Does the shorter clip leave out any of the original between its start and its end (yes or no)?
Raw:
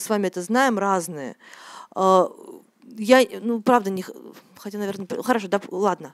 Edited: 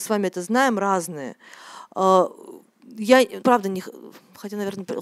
yes